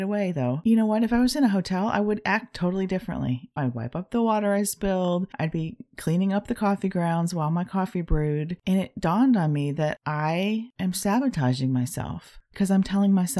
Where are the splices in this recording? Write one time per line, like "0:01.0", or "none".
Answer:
0:03.6